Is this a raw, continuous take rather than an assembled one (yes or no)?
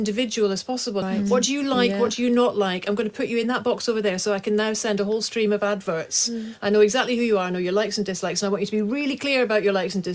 no